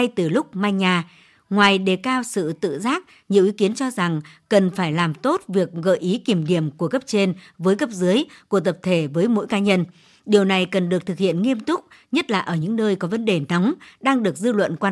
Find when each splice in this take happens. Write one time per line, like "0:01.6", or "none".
none